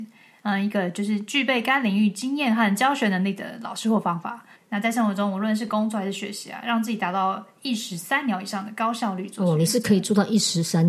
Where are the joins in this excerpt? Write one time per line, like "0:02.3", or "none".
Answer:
0:04.6